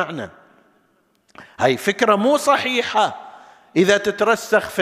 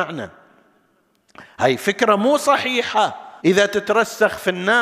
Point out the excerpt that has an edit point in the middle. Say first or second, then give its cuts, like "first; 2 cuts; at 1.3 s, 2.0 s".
second; 1 cut; at 3.4 s